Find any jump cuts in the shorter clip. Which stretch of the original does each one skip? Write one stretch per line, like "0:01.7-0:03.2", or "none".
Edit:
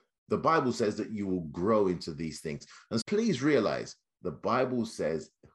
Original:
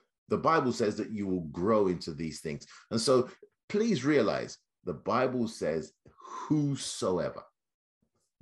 0:03.0-0:03.6